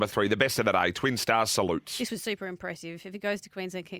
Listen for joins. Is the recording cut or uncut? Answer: uncut